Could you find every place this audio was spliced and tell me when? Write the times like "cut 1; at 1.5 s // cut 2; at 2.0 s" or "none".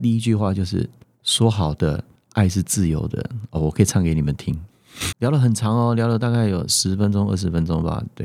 cut 1; at 5.1 s